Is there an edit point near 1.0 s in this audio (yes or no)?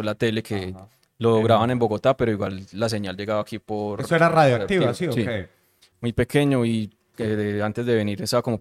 no